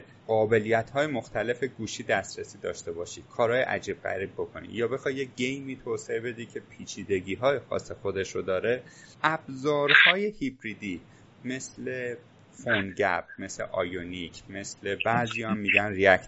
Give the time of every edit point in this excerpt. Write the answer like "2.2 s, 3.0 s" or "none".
none

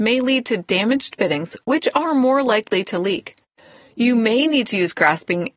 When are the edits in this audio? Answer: none

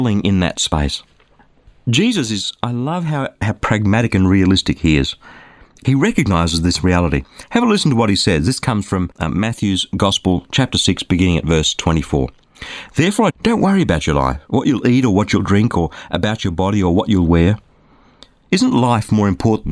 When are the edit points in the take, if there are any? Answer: 13.3 s

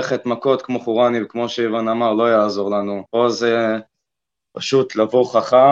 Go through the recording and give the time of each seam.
3.1 s

